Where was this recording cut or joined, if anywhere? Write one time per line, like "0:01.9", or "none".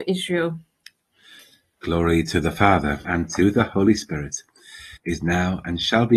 0:03.0
0:05.0